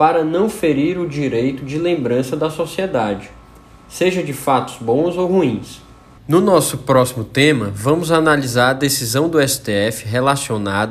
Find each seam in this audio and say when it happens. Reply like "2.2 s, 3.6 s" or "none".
6.2 s